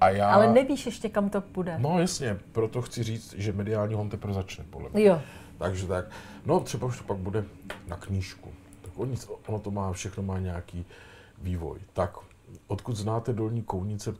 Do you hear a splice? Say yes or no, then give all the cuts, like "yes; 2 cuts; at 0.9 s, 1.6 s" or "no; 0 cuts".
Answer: no; 0 cuts